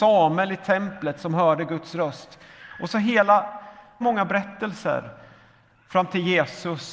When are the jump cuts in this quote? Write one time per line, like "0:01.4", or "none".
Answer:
0:04.0